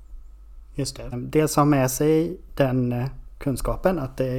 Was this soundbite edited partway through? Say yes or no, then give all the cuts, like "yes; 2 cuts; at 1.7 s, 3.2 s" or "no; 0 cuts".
yes; 1 cut; at 1.1 s